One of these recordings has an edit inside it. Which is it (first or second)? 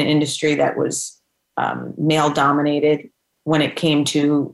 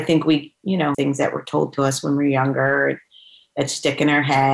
second